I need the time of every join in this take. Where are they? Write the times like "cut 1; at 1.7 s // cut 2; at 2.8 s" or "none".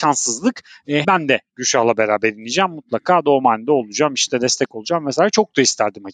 cut 1; at 1.0 s